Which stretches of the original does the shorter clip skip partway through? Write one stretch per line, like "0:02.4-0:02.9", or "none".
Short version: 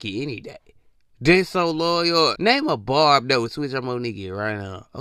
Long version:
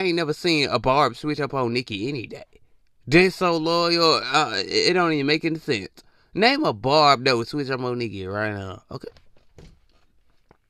0:04.2-0:06.3